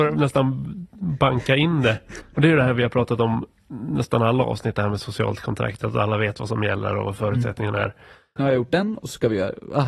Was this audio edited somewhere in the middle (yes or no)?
yes